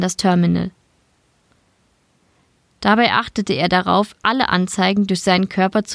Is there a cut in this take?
no; 0 cuts

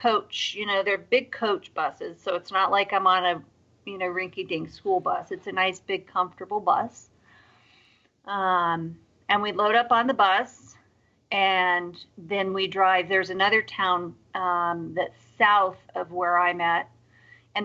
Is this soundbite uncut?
yes; 0 cuts

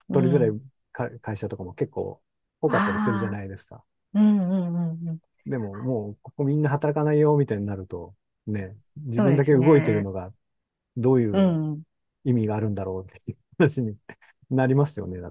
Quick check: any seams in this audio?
no; 0 cuts

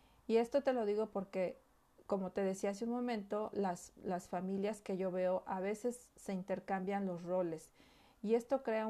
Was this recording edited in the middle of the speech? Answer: no; 0 cuts

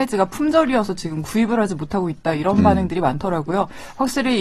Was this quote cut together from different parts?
no; 0 cuts

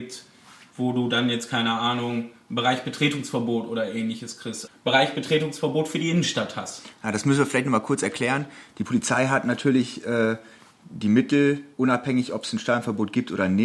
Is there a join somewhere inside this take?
yes; 1 cut; at 4.7 s

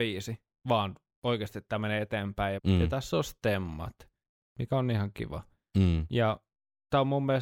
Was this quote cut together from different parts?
yes; 1 cut; at 2.6 s

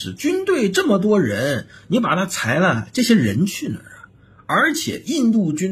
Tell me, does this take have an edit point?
no; 0 cuts

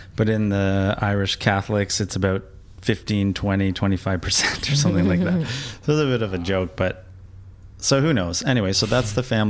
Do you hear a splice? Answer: no; 0 cuts

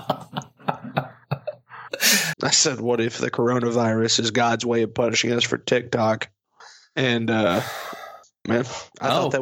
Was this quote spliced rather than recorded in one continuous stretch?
yes; 2 cuts; at 2.3 s, 8.4 s

